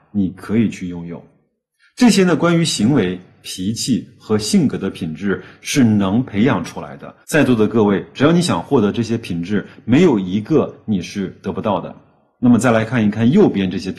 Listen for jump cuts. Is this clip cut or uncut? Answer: cut